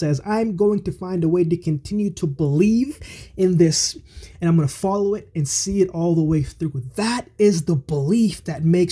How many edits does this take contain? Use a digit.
1